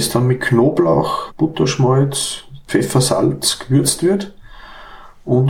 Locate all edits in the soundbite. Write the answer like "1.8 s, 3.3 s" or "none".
1.3 s, 2.7 s